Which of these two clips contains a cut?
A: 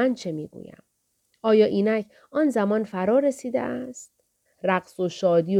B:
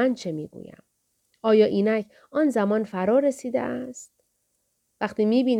A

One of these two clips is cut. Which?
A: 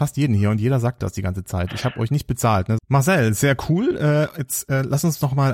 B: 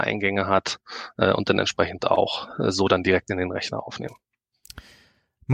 A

